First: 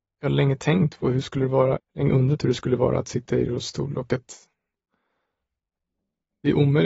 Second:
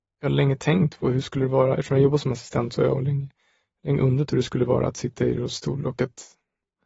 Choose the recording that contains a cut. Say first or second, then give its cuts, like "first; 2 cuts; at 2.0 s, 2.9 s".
first; 1 cut; at 1.7 s